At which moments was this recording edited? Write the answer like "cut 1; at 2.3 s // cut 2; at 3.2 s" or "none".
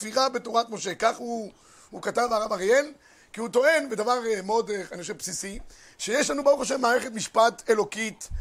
none